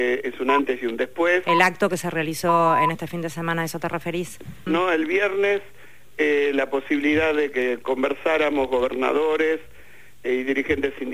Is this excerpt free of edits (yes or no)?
no